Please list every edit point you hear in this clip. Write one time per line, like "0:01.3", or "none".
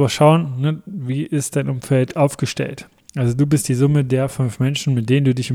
none